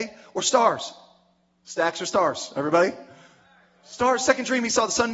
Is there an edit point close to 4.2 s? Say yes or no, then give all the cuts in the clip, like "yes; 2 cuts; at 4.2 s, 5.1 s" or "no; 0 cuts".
no; 0 cuts